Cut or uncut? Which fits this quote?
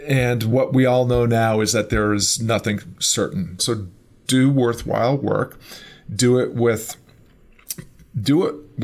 cut